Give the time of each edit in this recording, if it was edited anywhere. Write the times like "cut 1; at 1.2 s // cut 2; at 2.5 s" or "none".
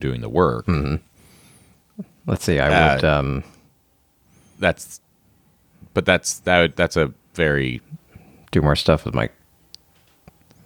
none